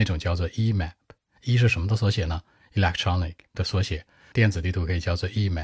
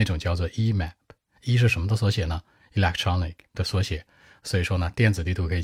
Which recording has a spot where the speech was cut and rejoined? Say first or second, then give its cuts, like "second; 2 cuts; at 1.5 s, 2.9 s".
first; 1 cut; at 4.3 s